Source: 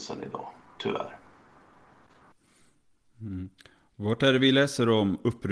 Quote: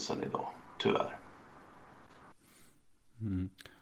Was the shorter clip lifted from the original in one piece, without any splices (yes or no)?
yes